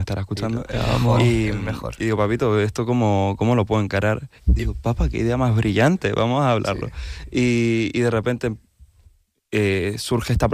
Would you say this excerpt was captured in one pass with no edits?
no; 1 cut; at 4.4 s

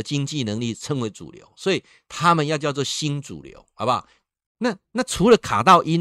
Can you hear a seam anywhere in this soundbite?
yes; 1 cut; at 4.5 s

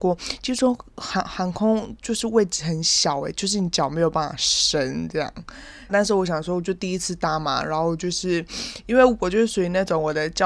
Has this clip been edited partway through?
yes; 1 cut; at 5.9 s

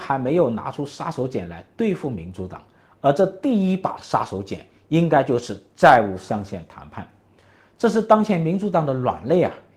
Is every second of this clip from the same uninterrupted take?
yes; 0 cuts

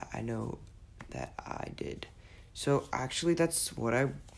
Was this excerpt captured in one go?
yes; 0 cuts

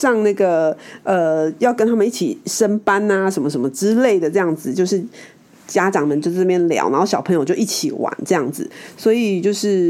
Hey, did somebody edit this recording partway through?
no; 0 cuts

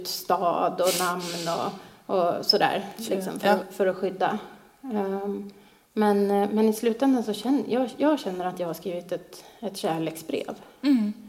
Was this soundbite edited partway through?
no; 0 cuts

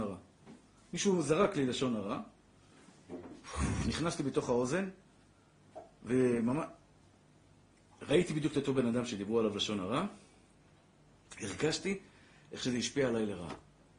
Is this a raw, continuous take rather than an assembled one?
yes; 0 cuts

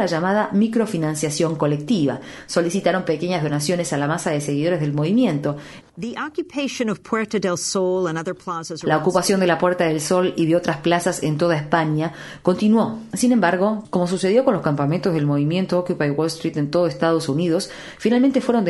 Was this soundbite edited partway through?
yes; 1 cut; at 5.8 s

